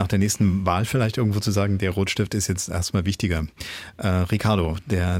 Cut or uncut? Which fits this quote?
uncut